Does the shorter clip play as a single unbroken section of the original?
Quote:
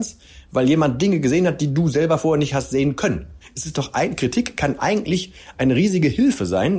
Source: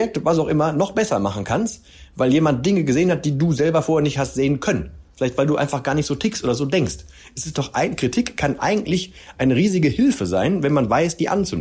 no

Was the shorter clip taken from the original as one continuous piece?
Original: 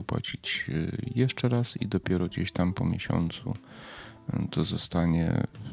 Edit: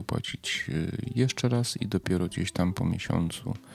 yes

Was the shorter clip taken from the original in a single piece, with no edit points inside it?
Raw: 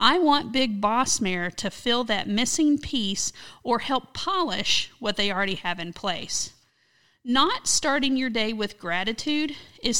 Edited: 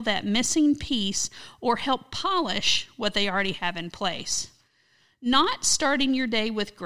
yes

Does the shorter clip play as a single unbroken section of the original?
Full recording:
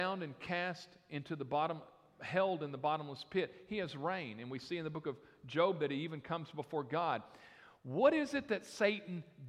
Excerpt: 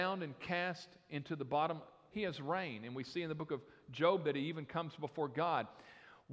no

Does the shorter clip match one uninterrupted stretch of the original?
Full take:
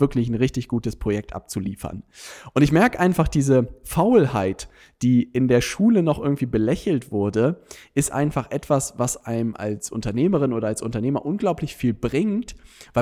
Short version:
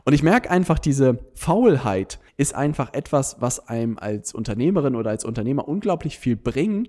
no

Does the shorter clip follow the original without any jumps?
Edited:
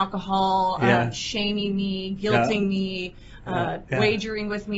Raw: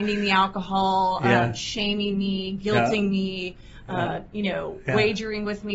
no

